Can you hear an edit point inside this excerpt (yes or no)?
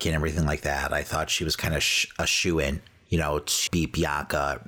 yes